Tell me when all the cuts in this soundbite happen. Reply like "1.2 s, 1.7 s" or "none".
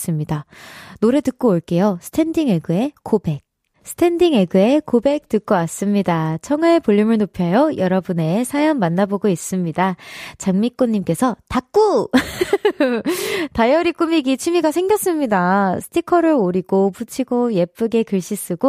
none